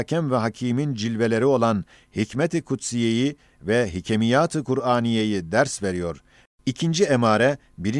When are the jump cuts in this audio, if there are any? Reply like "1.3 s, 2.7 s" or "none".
6.5 s